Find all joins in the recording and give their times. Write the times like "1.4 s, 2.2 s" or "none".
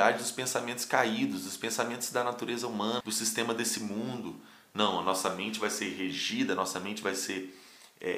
3.0 s